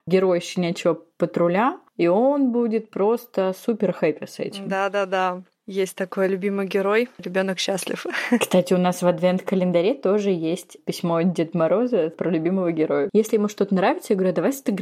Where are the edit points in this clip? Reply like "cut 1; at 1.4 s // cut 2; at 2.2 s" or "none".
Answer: cut 1; at 1.9 s // cut 2; at 7.2 s // cut 3; at 13.1 s